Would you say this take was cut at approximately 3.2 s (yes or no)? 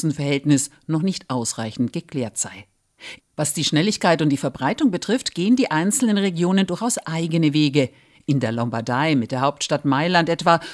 yes